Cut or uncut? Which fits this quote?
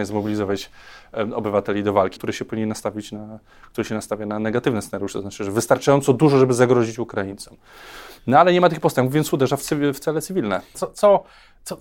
cut